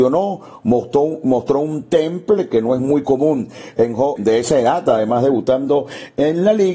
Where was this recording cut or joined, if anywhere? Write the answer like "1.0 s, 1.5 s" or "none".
4.2 s